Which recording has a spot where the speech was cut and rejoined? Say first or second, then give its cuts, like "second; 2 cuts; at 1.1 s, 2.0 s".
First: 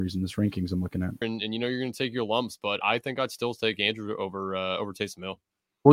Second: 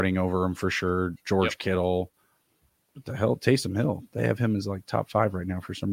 first; 2 cuts; at 1.2 s, 2.8 s